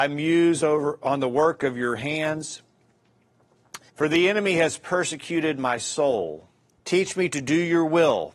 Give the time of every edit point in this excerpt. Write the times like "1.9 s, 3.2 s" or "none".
3.9 s, 6.8 s